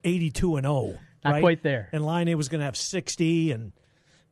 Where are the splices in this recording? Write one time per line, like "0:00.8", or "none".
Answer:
none